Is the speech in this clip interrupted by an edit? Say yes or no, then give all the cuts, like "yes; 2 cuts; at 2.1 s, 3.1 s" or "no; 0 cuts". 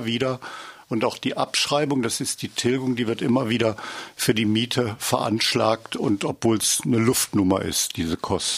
no; 0 cuts